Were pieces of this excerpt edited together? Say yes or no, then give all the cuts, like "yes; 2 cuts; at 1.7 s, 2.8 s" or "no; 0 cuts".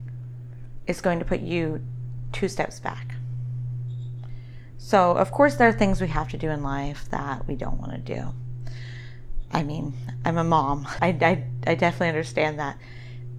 yes; 1 cut; at 11.0 s